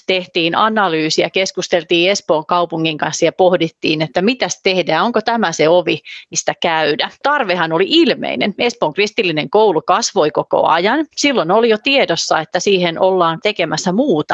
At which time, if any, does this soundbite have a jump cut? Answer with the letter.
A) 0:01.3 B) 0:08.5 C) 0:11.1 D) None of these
C